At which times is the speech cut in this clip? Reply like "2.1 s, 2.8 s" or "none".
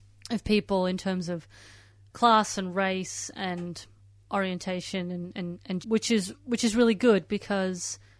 2.1 s, 5.8 s